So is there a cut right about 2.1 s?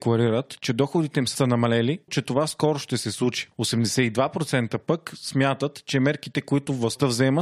yes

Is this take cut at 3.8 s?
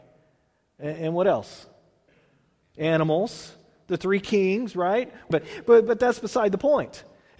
no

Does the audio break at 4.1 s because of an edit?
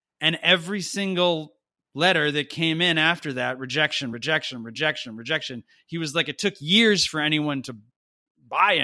yes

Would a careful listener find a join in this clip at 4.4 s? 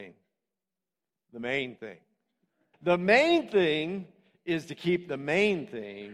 no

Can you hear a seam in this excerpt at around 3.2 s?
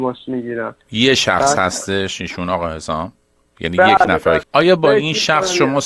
no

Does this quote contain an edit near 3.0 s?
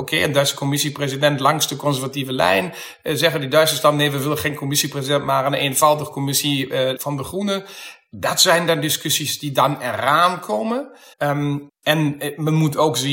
no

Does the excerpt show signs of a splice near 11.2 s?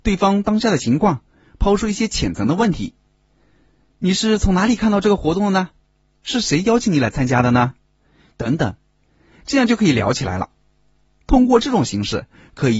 no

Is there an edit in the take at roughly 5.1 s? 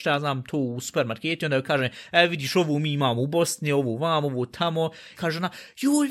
yes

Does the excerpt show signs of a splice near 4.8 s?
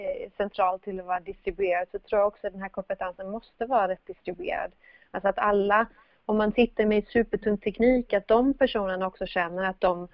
no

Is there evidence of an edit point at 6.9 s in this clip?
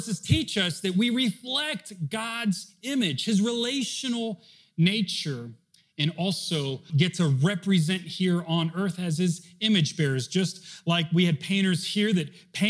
yes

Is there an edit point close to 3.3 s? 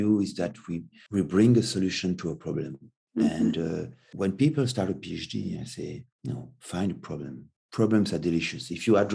no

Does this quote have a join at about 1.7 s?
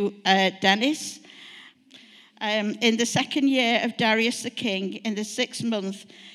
yes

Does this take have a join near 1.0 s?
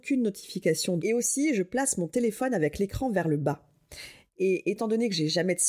yes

